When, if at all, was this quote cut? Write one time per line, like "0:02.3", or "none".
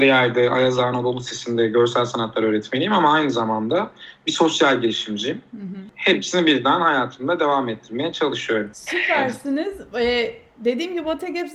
none

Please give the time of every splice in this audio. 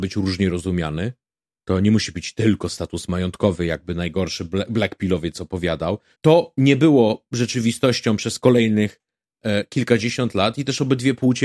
0:06.1

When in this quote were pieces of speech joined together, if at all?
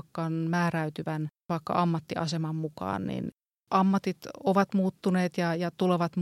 none

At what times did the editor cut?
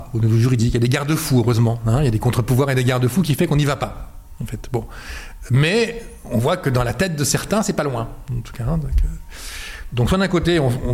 none

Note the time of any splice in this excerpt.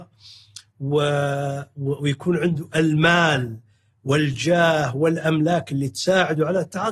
none

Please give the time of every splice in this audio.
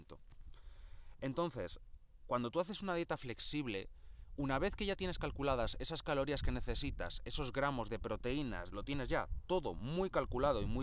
0:08.7

